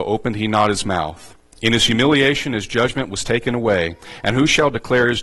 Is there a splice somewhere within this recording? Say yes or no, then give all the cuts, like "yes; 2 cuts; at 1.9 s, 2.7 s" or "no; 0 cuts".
no; 0 cuts